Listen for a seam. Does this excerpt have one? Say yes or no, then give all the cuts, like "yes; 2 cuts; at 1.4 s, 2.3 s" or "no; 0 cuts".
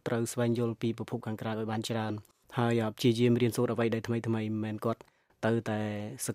no; 0 cuts